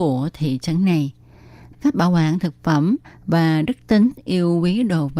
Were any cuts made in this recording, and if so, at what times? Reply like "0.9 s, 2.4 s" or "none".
1.7 s